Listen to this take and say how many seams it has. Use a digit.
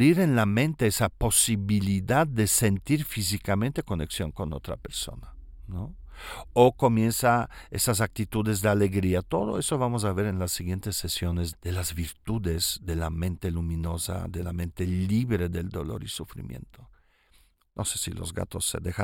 2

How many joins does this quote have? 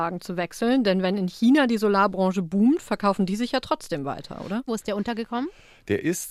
1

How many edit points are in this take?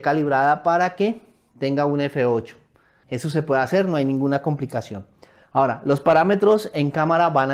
1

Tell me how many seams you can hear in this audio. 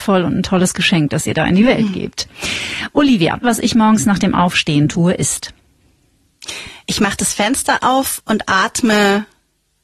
1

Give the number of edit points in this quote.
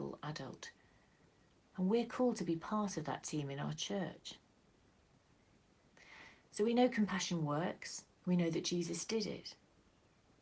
1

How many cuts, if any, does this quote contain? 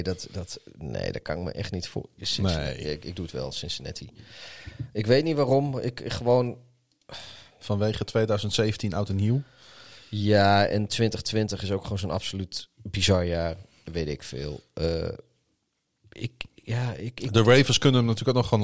0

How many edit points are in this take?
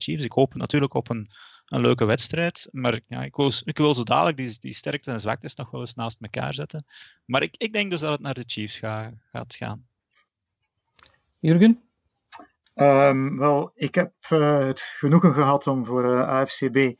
0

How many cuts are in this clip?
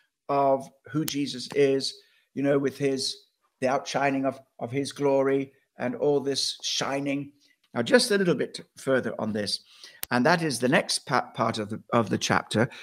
1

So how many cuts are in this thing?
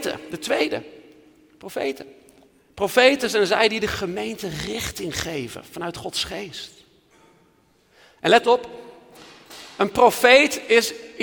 0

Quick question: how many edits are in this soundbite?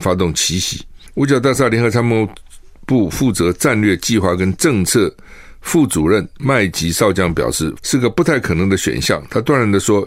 2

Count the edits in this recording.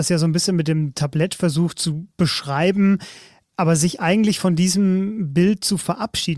0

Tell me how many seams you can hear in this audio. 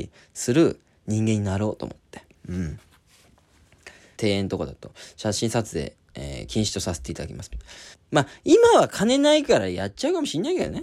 2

